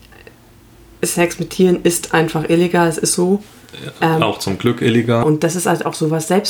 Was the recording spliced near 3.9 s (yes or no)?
no